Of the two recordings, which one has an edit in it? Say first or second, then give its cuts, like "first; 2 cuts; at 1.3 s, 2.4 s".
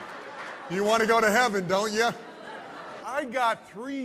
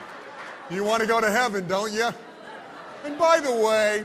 first; 1 cut; at 3.0 s